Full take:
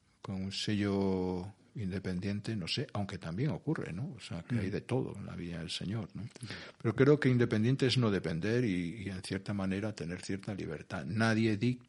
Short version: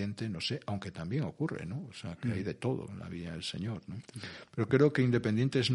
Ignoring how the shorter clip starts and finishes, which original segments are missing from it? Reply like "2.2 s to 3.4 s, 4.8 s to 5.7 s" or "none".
none